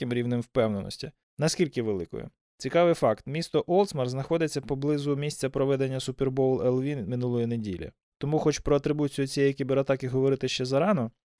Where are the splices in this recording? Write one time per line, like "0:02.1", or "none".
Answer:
0:01.2